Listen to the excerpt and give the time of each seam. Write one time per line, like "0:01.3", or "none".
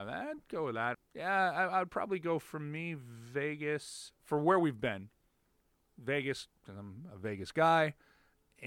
0:00.9